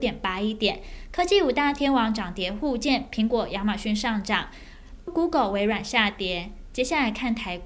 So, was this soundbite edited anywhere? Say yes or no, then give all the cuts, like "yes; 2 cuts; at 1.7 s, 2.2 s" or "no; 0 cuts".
yes; 1 cut; at 5.1 s